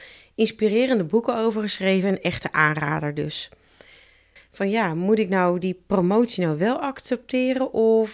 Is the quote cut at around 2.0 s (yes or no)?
no